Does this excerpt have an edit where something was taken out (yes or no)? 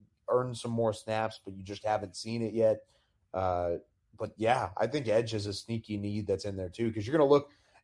no